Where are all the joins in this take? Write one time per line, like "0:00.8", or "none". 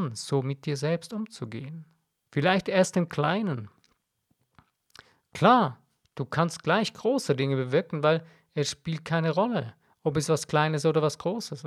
0:02.3

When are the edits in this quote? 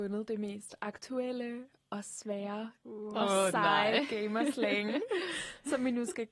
none

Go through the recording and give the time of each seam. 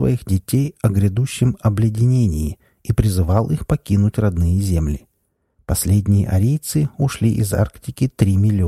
0:05.5

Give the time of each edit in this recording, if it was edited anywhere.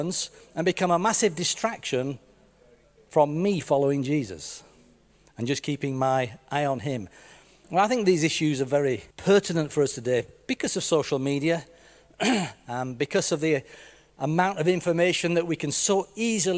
0:07.6
0:09.1

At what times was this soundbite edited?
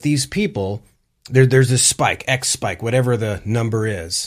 none

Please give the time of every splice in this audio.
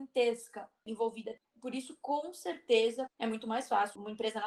0:03.1

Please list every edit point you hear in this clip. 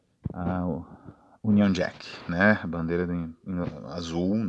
none

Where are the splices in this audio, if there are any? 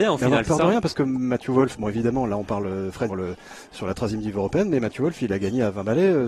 0:03.1

